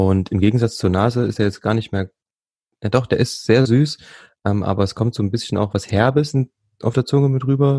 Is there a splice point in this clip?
no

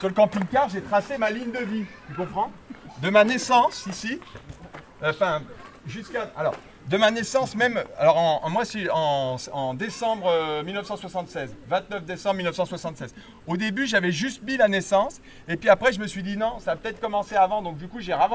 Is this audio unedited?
yes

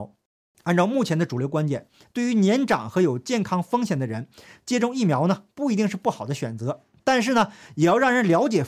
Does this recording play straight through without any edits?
yes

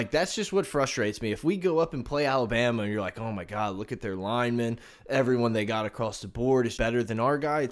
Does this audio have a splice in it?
yes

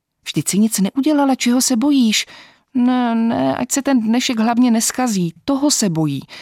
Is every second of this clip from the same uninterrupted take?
yes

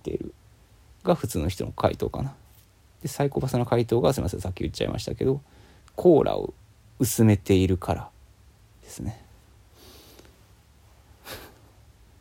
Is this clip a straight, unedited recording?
no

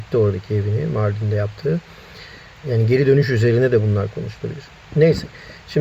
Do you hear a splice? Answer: yes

